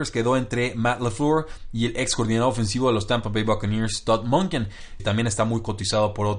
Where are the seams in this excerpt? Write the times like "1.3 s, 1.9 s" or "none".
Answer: 5.0 s

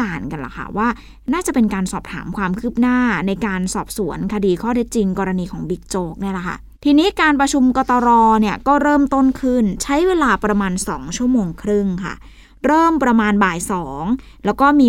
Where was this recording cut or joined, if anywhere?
6.7 s

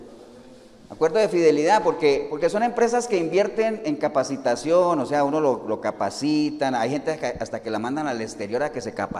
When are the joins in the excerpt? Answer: none

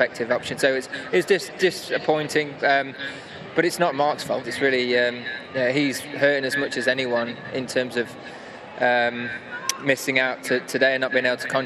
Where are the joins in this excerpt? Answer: 4.4 s

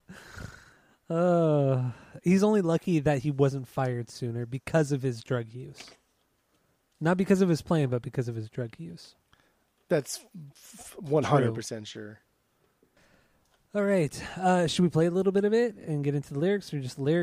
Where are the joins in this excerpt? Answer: none

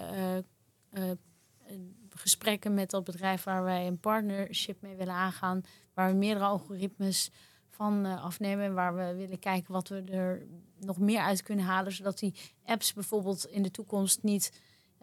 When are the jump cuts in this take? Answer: none

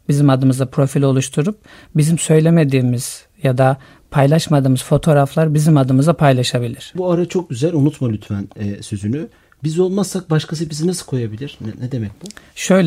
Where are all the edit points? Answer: 7.0 s

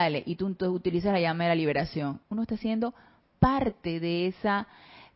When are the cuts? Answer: 2.2 s

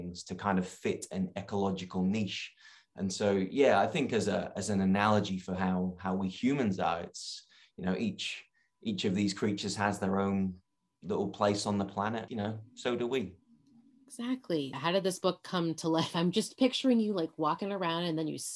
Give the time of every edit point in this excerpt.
12.3 s, 14.7 s

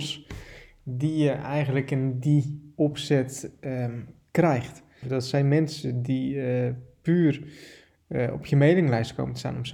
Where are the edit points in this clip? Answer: 5.0 s

